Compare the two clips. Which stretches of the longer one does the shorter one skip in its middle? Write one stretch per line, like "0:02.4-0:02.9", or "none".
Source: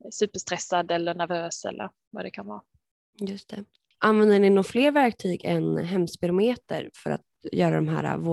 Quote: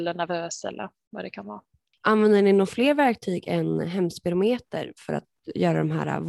0:02.9-0:03.8